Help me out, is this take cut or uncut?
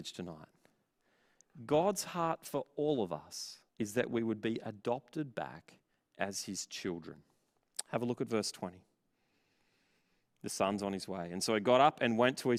cut